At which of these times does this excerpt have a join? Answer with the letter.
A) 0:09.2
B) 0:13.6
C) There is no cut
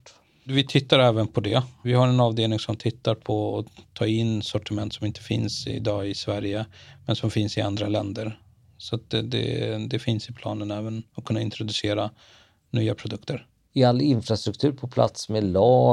C